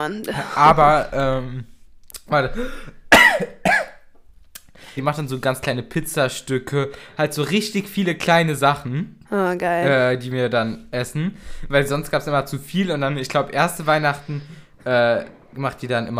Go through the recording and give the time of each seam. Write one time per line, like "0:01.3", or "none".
0:05.0